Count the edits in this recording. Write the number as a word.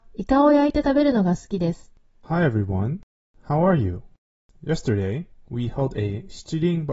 one